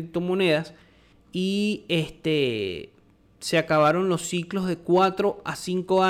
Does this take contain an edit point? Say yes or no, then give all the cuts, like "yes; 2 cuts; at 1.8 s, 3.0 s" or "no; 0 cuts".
yes; 1 cut; at 1.1 s